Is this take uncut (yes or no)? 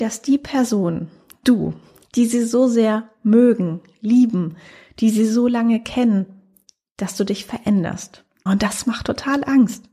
no